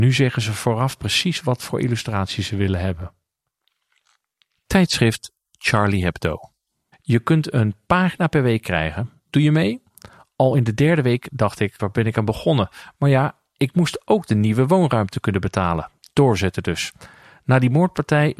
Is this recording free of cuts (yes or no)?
no